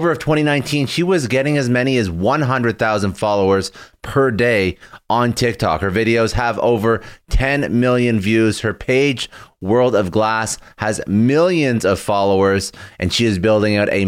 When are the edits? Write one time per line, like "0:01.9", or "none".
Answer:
none